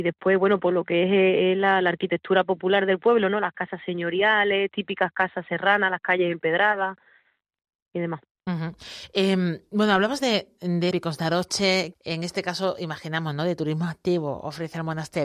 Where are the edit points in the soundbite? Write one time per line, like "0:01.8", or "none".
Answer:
0:10.9
0:11.9